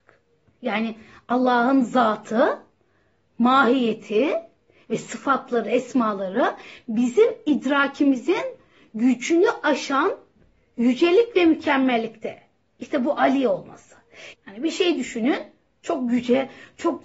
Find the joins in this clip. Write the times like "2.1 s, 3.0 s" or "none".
14.3 s